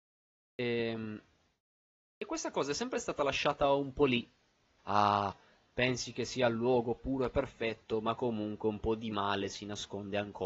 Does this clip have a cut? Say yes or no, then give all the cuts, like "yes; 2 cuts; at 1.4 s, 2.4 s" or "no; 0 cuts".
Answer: yes; 1 cut; at 4.8 s